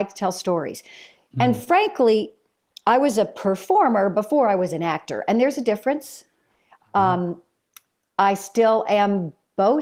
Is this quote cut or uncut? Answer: uncut